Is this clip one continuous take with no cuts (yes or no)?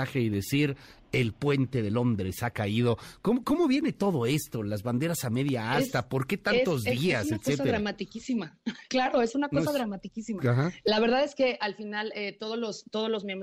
yes